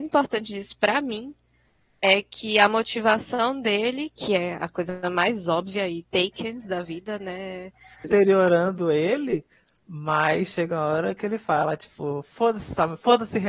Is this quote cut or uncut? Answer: cut